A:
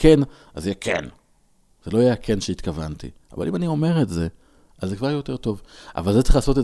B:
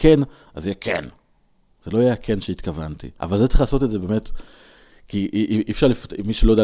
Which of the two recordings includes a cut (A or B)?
B